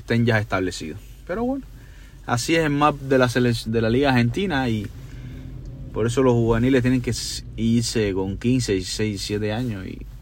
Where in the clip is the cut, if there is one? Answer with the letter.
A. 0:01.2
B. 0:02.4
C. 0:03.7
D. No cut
C